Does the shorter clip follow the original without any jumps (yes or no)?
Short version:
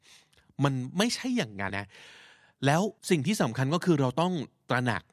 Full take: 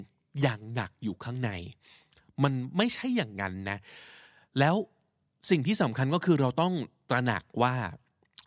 no